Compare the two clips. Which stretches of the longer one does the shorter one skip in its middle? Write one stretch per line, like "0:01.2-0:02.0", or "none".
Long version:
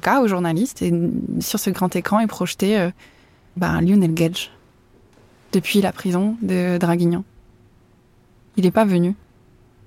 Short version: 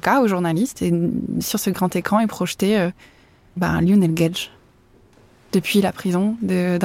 none